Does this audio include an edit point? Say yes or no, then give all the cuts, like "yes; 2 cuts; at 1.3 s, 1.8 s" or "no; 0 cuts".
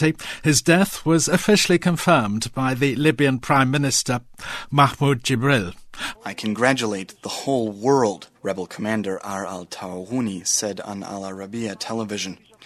yes; 2 cuts; at 6.1 s, 8.4 s